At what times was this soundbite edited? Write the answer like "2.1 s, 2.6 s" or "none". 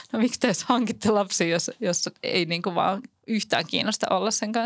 none